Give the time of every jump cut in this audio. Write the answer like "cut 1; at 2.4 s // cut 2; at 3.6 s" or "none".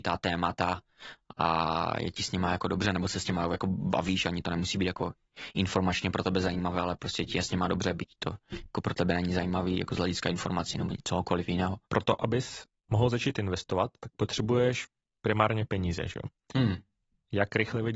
cut 1; at 11.8 s